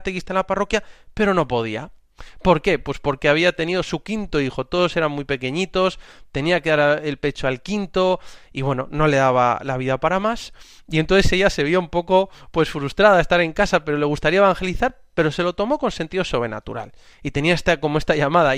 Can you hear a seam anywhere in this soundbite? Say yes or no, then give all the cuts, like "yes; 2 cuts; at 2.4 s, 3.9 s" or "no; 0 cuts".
yes; 1 cut; at 17.1 s